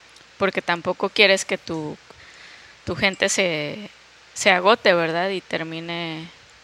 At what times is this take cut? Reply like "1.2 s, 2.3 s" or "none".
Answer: none

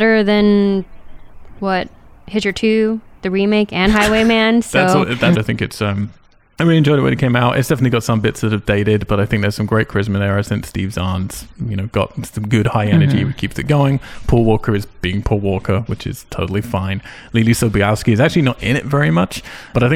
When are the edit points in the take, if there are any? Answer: 5.3 s

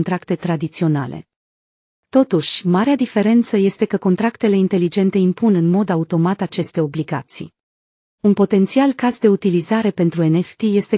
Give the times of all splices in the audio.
8.2 s

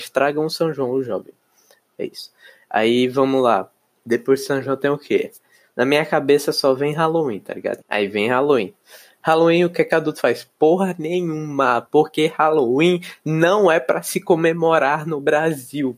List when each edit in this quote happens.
7.8 s

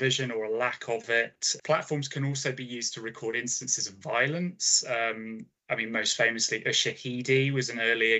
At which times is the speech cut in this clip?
1.6 s

